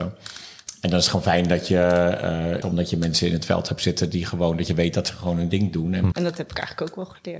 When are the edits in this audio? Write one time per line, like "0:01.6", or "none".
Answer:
0:02.6
0:06.1